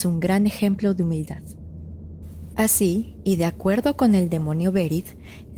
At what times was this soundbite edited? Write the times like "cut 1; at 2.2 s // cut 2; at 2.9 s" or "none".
cut 1; at 2.5 s

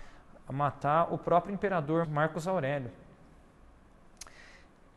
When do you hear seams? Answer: cut 1; at 2.0 s

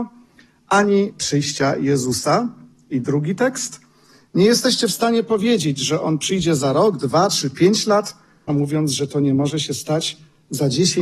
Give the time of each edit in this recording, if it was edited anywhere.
cut 1; at 8.5 s

